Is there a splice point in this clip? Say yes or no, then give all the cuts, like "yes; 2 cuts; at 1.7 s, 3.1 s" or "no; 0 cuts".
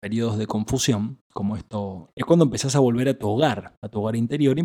yes; 1 cut; at 2.1 s